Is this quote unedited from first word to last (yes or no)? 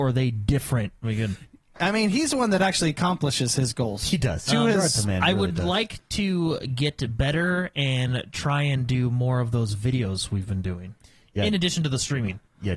no